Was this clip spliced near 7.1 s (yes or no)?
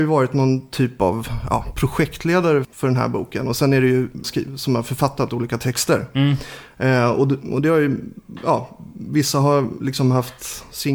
no